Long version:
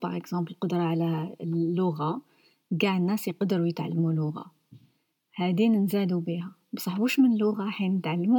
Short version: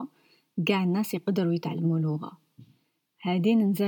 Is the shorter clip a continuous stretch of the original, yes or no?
yes